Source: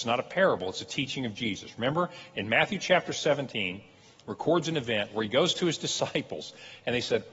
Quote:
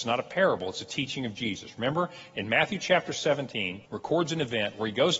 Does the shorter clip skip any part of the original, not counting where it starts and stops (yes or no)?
yes